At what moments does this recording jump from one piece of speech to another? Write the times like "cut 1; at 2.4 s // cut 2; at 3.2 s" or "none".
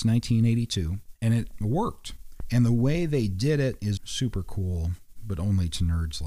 cut 1; at 1.1 s // cut 2; at 4.0 s